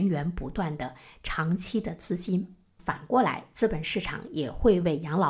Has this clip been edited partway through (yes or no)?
yes